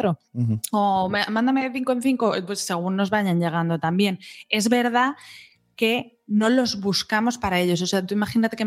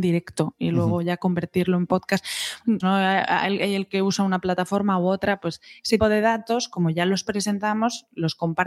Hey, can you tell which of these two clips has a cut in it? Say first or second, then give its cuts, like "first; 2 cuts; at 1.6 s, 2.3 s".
second; 2 cuts; at 2.8 s, 6.0 s